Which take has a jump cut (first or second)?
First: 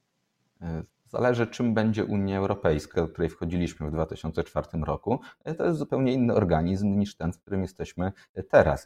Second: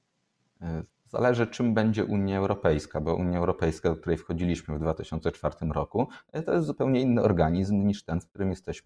first